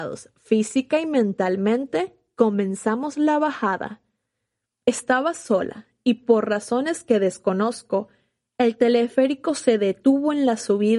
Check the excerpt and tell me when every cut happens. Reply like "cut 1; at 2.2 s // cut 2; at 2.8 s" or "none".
cut 1; at 4.7 s